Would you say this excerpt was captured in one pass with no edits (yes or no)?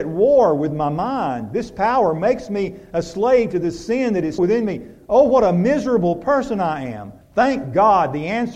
no